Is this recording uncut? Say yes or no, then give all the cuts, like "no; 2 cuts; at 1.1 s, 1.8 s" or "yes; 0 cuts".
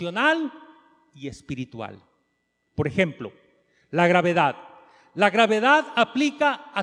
no; 1 cut; at 2.7 s